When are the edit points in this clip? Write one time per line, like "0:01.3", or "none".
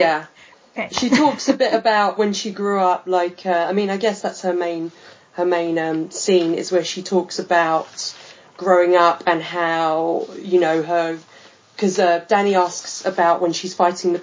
none